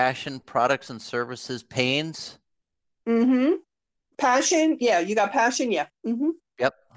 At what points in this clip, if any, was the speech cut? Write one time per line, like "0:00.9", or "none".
0:04.1